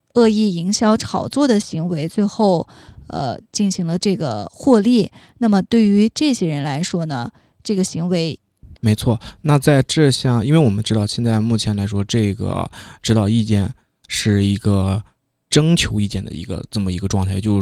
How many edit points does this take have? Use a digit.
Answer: 1